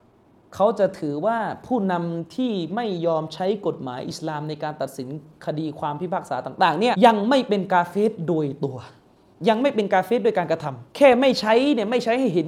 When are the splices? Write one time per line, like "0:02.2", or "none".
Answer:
0:06.9
0:10.9